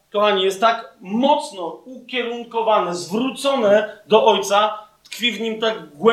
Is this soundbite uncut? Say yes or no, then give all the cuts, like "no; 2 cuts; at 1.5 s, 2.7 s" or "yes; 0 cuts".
yes; 0 cuts